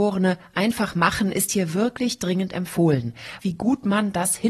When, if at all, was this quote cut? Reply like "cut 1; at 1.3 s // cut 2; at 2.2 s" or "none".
cut 1; at 3.4 s